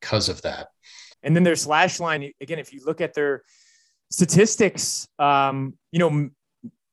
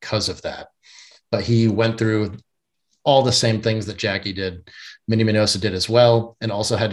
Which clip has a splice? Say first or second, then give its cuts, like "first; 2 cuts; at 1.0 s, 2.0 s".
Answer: first; 2 cuts; at 1.1 s, 2.2 s